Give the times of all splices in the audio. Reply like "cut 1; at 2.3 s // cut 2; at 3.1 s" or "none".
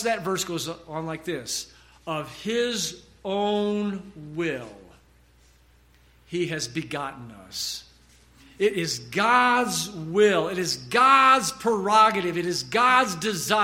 none